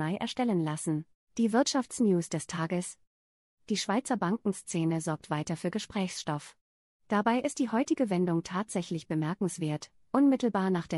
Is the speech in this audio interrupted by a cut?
yes; 1 cut; at 1.2 s

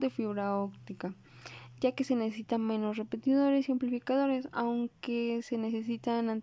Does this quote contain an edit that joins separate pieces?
no; 0 cuts

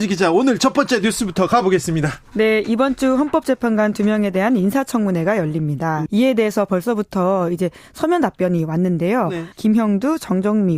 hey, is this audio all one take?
no; 2 cuts; at 6.1 s, 9.5 s

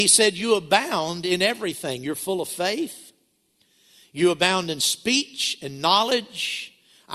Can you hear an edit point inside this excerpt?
no; 0 cuts

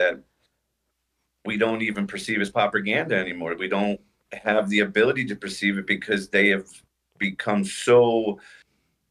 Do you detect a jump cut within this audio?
no; 0 cuts

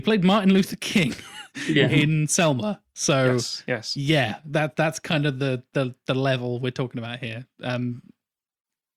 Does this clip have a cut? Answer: no; 0 cuts

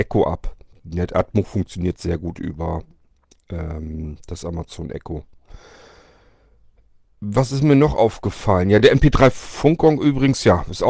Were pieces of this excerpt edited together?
no; 0 cuts

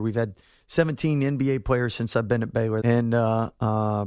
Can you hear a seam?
yes; 1 cut; at 2.8 s

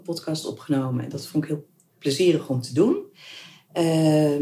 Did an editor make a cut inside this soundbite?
no; 0 cuts

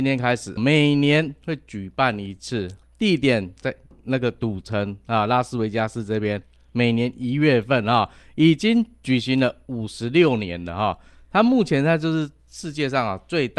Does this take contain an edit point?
no; 0 cuts

